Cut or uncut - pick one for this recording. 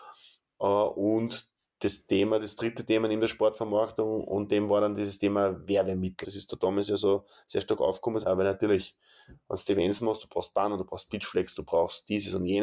cut